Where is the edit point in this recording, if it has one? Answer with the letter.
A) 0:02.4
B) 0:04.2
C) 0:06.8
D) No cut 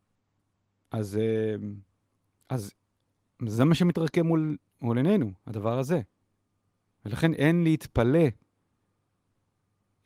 D